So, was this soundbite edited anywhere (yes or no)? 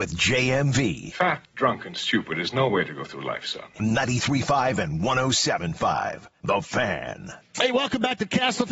no